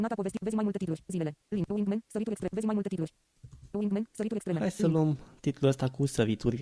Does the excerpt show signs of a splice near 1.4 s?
yes; 1 cut; at 1.4 s

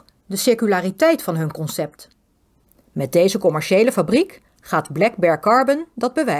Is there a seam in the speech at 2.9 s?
yes; 2 cuts; at 2.9 s, 4.5 s

